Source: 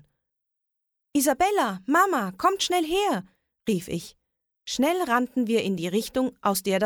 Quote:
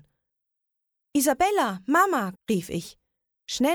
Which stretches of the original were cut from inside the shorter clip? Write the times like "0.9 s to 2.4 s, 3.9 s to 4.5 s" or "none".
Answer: 2.3 s to 3.5 s